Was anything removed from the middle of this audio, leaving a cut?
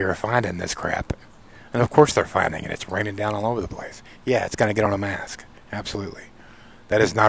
no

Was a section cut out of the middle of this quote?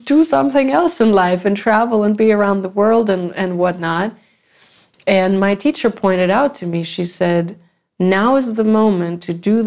no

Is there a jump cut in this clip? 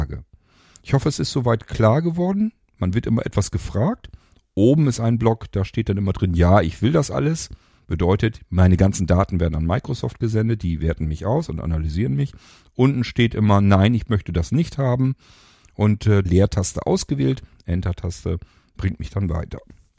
yes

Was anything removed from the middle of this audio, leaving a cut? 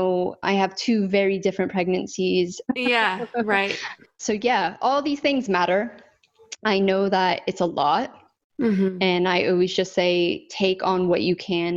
yes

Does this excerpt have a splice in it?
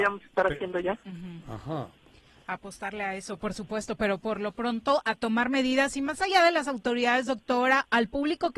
no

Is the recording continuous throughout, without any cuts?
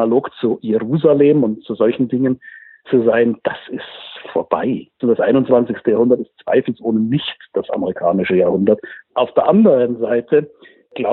no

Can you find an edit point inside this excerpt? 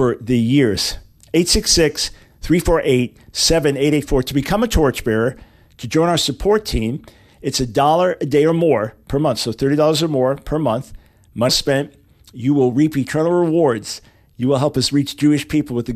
yes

